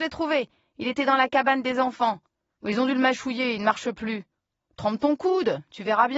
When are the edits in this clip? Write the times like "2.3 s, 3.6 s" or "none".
2.6 s